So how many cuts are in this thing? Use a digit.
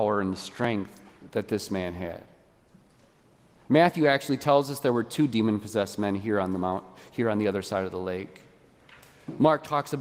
0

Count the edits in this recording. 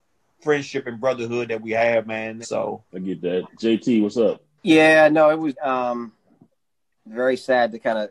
2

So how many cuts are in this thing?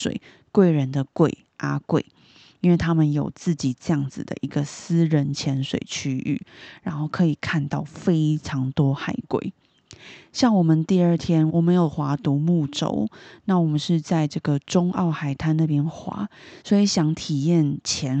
2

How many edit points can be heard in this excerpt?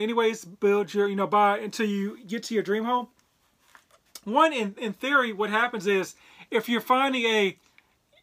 0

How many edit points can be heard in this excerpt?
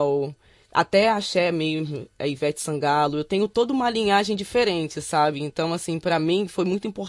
0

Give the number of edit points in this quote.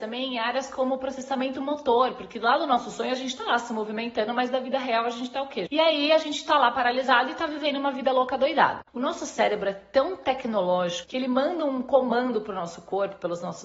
3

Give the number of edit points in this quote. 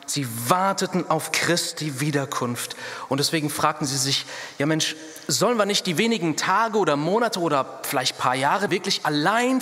1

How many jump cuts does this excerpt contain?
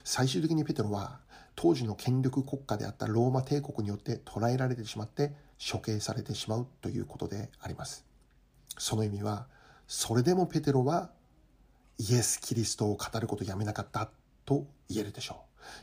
1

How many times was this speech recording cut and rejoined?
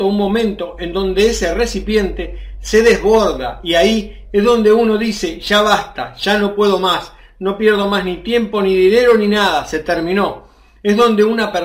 0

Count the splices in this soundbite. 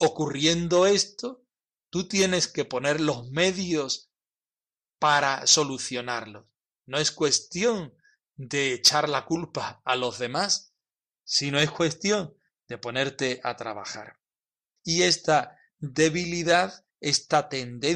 1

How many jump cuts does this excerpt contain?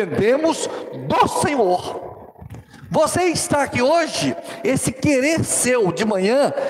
0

